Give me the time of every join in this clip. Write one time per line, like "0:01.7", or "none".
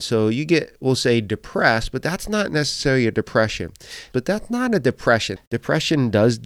0:04.1
0:05.4